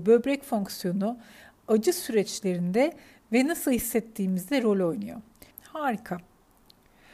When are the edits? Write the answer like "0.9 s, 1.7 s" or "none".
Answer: 5.5 s

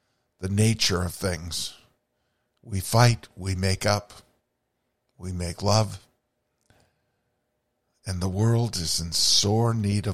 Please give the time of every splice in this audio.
none

